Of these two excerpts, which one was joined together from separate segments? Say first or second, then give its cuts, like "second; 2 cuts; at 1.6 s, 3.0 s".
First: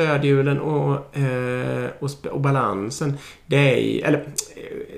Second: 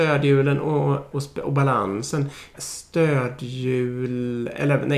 second; 2 cuts; at 1.1 s, 2.5 s